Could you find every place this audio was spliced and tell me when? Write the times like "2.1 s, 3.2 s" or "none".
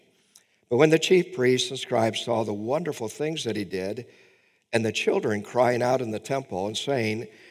none